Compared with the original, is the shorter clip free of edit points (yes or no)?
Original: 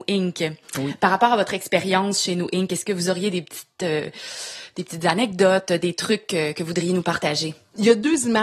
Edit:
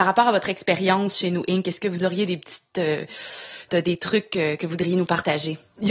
no